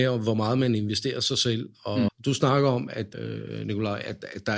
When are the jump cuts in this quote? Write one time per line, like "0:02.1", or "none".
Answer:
0:02.1
0:03.1